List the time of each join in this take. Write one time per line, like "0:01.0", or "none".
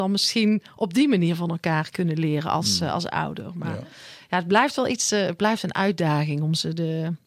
none